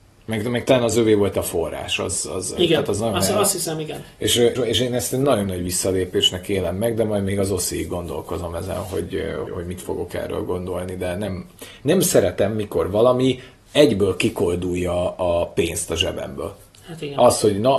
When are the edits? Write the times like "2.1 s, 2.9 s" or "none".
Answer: 4.6 s, 9.5 s